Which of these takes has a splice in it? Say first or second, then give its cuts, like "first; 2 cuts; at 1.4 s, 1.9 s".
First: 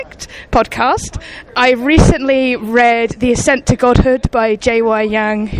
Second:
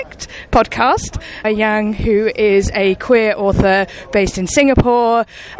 second; 1 cut; at 1.4 s